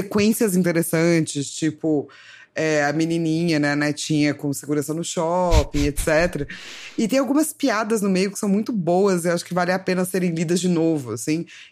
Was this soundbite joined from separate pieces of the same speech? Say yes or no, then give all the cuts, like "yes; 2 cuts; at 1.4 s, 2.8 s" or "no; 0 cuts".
no; 0 cuts